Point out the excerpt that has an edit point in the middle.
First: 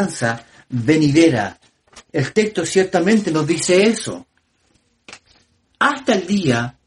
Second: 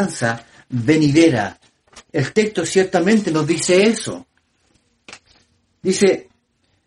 first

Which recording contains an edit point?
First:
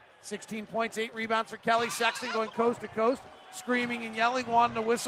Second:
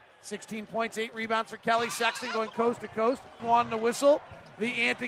second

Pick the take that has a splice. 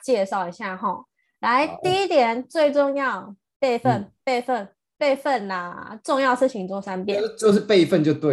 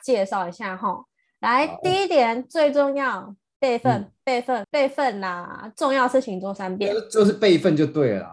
second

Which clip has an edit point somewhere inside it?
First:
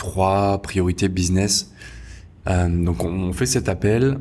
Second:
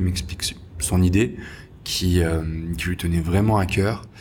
first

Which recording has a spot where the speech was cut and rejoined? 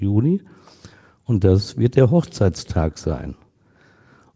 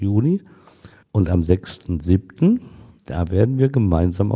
second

